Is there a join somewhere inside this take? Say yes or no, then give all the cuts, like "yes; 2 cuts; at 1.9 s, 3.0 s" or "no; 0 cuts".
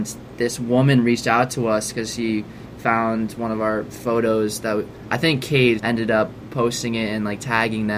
yes; 1 cut; at 5.8 s